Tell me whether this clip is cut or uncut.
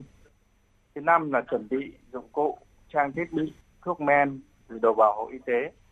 uncut